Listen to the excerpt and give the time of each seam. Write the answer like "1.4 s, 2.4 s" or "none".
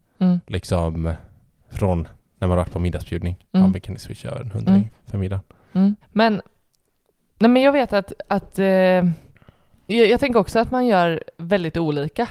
4.9 s, 6.0 s